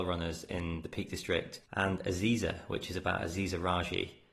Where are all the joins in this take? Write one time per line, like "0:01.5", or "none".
0:01.6